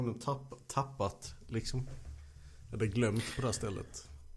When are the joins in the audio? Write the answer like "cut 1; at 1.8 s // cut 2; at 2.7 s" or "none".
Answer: none

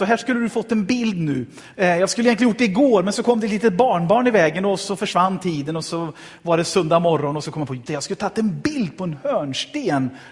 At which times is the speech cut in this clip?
cut 1; at 1.7 s // cut 2; at 7.9 s

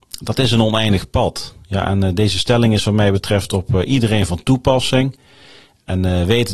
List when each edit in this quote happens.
none

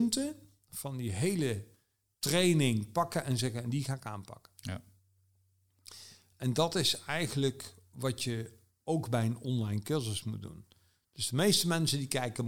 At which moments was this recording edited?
none

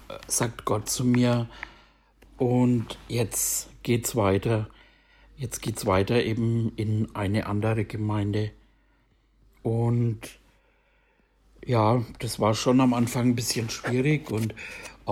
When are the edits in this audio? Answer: none

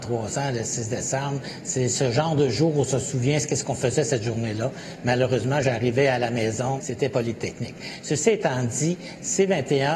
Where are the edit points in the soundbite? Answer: cut 1; at 6.8 s

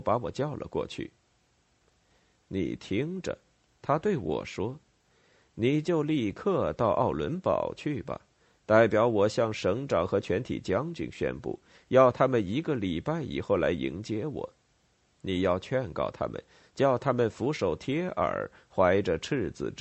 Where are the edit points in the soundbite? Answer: none

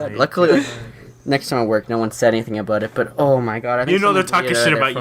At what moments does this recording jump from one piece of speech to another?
none

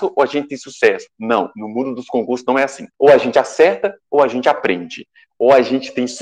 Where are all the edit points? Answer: cut 1; at 2.9 s

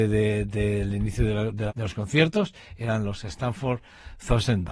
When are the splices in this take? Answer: cut 1; at 1.7 s

